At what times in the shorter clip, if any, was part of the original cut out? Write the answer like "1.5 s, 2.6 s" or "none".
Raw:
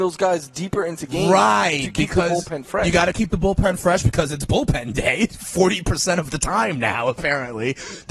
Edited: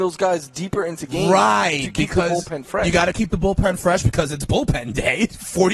none